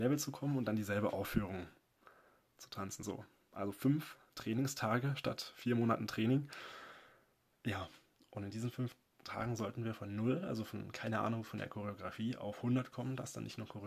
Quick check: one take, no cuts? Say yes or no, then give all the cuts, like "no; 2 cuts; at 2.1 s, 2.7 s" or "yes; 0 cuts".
yes; 0 cuts